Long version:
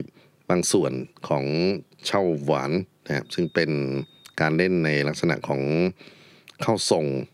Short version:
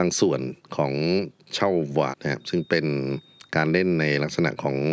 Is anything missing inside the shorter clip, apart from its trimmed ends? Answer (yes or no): yes